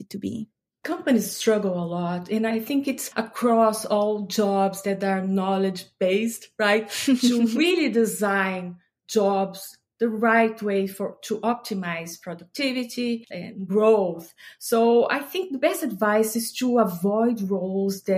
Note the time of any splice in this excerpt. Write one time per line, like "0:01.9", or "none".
0:02.5